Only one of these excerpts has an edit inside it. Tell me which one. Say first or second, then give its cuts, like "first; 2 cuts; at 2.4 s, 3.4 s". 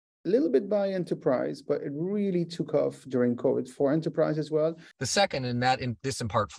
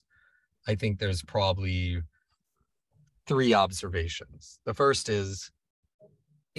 first; 1 cut; at 4.9 s